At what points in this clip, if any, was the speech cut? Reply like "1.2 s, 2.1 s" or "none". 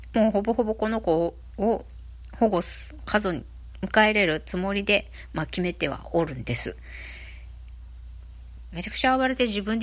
3.0 s, 8.7 s